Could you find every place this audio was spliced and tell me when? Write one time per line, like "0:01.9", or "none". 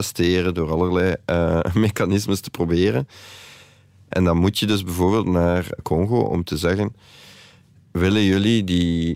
none